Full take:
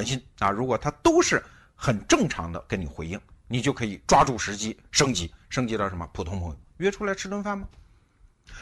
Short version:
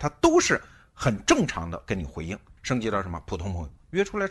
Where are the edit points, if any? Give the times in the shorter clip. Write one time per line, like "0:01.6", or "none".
0:02.6

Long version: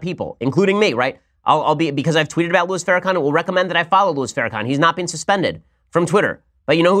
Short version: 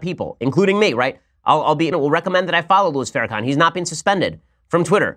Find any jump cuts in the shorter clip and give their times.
0:01.9

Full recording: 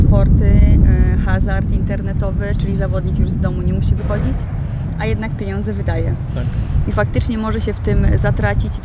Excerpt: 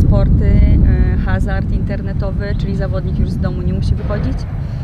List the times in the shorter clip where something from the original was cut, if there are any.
none

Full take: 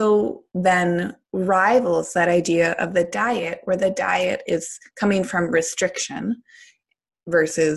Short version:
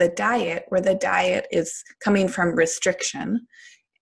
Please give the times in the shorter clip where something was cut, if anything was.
none

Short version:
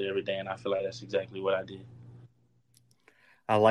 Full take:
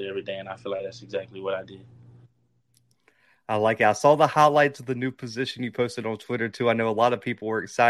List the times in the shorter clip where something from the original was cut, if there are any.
none

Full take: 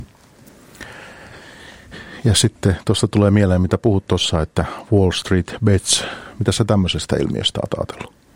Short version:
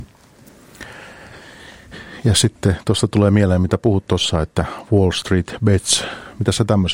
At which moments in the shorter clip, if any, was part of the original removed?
none

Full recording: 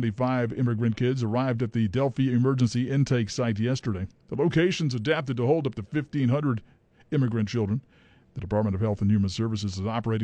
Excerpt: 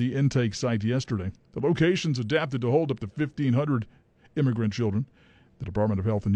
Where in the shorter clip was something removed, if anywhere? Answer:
none

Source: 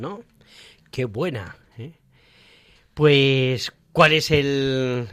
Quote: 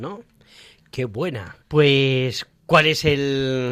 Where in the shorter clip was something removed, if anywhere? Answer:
0:01.6

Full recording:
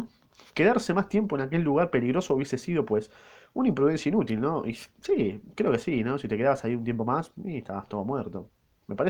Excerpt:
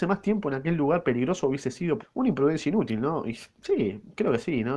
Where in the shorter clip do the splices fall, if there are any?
0:02.0

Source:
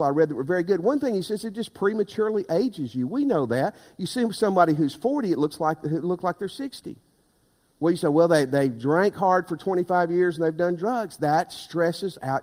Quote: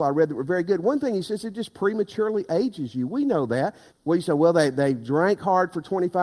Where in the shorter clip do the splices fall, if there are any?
0:03.9

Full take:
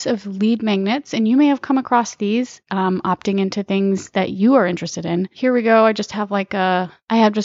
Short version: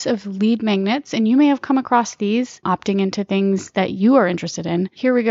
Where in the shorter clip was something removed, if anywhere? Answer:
0:02.6

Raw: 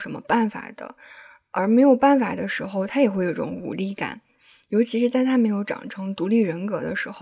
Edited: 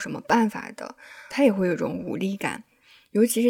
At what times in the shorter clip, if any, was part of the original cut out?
0:01.3

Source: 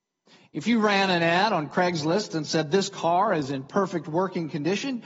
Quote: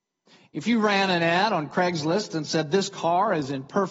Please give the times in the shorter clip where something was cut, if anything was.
none

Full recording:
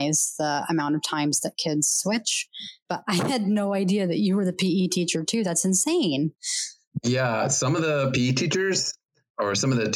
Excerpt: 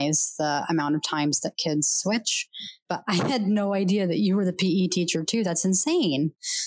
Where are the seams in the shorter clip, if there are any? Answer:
none

